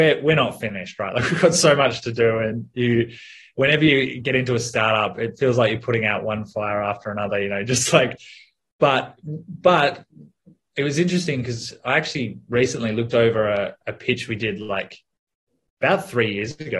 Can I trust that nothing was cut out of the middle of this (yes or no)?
yes